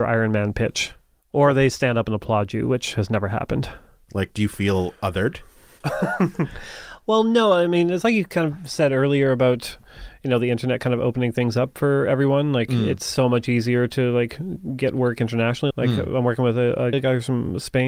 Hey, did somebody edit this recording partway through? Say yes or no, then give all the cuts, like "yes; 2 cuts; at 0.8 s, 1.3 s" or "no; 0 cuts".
yes; 3 cuts; at 4.1 s, 15.7 s, 16.9 s